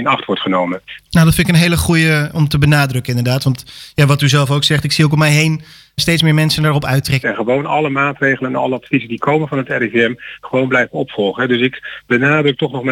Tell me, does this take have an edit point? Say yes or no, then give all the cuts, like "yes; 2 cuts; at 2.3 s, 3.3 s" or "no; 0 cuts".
yes; 3 cuts; at 1.1 s, 6.0 s, 7.2 s